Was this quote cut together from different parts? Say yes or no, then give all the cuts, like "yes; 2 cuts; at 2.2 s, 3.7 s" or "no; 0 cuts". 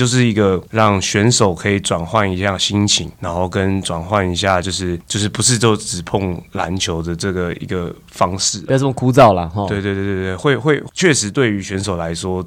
no; 0 cuts